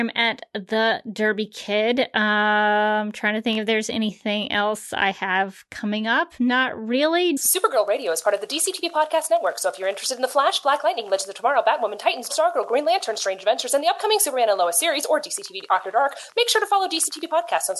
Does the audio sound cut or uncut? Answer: cut